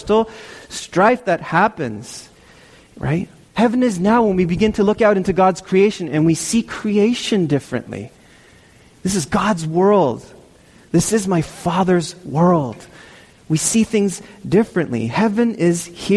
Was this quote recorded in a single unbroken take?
no; 1 cut; at 3.4 s

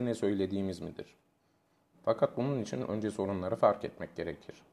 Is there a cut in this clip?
yes; 1 cut; at 1.9 s

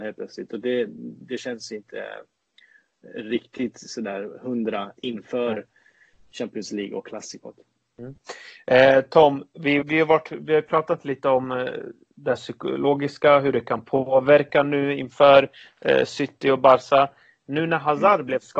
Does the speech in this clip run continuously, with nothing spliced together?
no; 1 cut; at 9.8 s

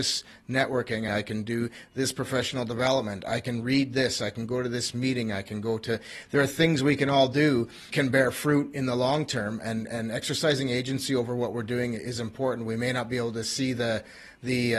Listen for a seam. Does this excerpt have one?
yes; 2 cuts; at 1.1 s, 7.9 s

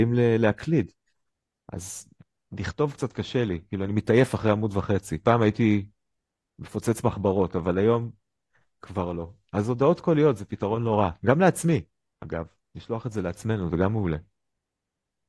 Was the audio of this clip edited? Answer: no; 0 cuts

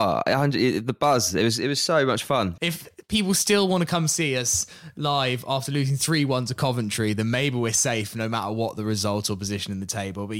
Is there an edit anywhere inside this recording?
yes; 1 cut; at 2.6 s

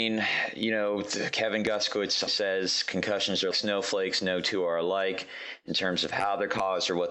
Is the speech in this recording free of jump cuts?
no; 2 cuts; at 2.3 s, 3.5 s

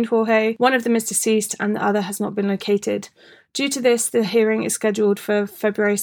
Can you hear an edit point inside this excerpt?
no; 0 cuts

